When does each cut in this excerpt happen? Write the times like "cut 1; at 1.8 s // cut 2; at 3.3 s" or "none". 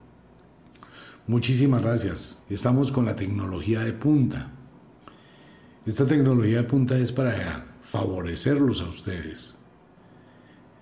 cut 1; at 2.4 s